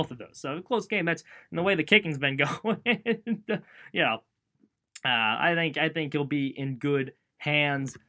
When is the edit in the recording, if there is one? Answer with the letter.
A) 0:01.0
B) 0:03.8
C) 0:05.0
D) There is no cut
D